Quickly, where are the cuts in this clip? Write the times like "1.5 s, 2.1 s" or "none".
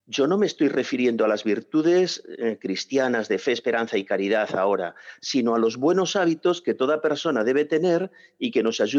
none